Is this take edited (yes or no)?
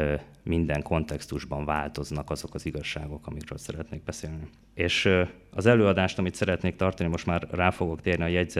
yes